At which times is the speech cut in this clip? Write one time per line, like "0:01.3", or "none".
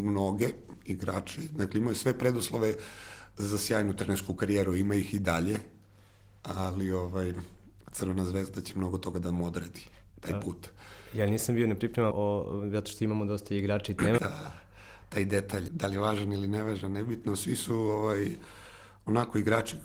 0:12.1
0:14.2
0:15.7